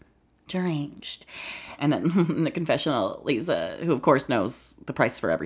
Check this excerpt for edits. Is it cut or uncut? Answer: cut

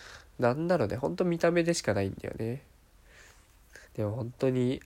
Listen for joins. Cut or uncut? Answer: cut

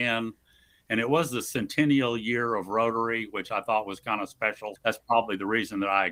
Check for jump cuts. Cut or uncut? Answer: cut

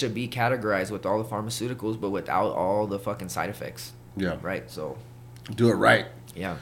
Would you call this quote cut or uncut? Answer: uncut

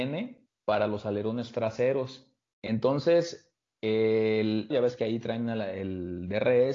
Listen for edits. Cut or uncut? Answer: cut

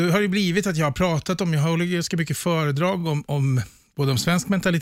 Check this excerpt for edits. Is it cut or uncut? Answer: uncut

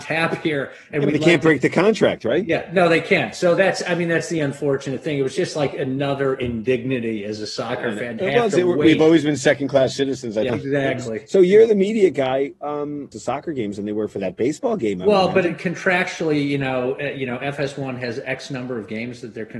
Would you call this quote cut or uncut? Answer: cut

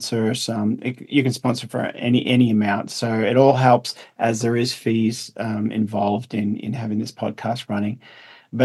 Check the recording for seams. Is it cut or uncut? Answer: uncut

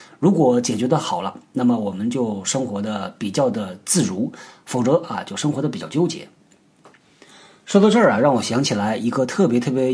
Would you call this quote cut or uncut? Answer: uncut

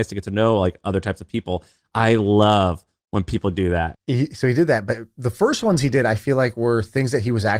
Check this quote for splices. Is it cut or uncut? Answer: cut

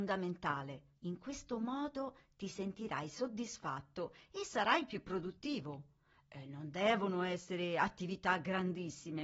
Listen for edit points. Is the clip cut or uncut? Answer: cut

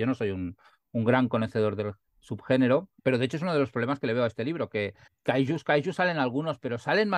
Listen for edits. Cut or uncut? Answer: cut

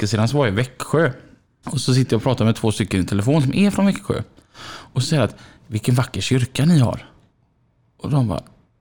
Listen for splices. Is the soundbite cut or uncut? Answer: cut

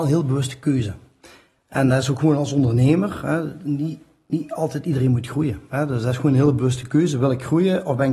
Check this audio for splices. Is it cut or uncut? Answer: uncut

